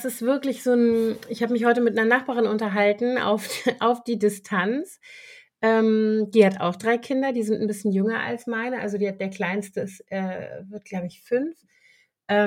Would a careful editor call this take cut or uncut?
uncut